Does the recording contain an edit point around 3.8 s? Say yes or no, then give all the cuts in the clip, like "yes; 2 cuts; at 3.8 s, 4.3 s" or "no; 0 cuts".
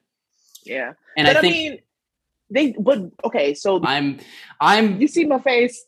yes; 1 cut; at 3.8 s